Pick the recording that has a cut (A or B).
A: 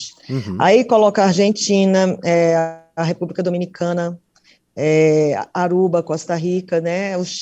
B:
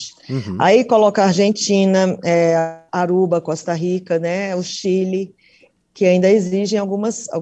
B